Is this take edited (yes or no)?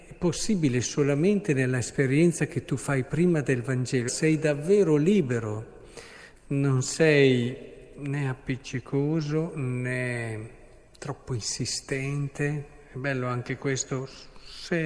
yes